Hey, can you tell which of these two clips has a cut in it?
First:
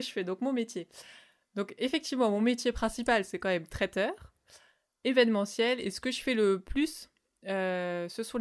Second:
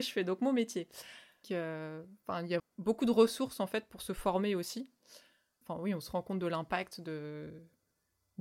second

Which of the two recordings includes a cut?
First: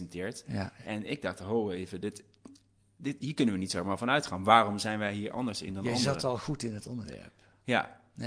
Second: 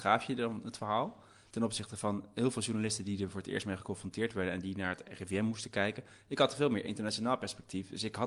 second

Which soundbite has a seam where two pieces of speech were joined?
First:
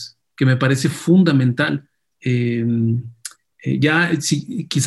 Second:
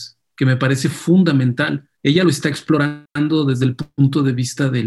second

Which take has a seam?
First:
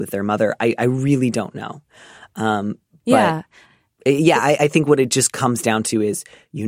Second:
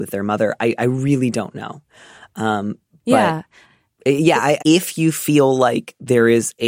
second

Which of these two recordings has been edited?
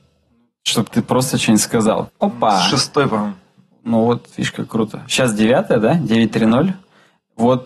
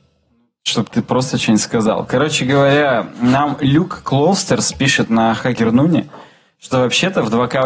first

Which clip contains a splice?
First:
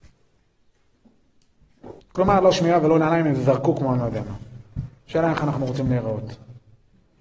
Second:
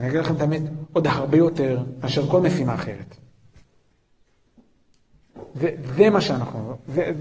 first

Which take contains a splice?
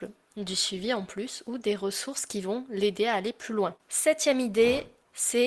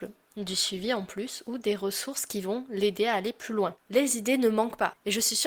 second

